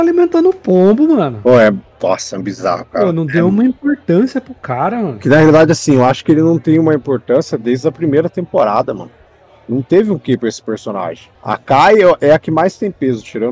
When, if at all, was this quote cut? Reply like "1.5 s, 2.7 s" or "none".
11.3 s